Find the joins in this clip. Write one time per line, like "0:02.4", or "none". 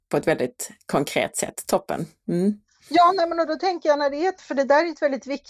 0:04.4